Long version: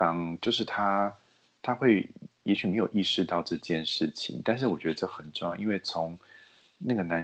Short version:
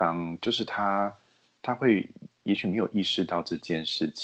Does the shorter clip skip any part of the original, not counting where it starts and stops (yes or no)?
no